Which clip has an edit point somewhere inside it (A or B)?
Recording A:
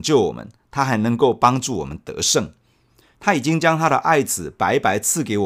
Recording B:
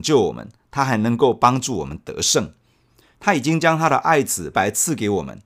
B